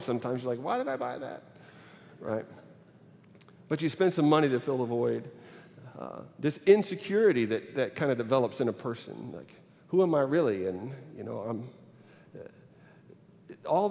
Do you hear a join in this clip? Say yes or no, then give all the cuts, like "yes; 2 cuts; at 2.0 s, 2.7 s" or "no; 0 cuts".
no; 0 cuts